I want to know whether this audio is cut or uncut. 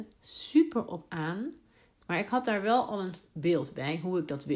cut